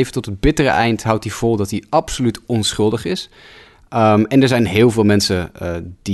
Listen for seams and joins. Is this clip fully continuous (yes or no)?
yes